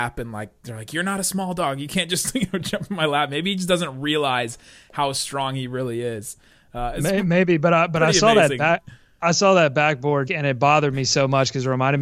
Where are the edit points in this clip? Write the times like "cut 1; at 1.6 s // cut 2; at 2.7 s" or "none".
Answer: cut 1; at 10.3 s